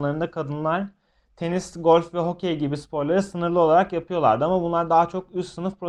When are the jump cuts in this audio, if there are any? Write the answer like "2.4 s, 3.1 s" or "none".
none